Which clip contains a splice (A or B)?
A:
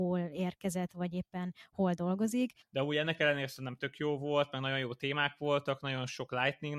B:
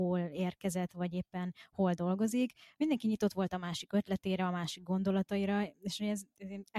A